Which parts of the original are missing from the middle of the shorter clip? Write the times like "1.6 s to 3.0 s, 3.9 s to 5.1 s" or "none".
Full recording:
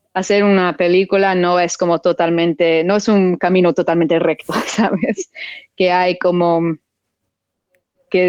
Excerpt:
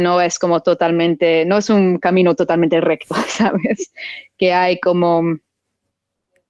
none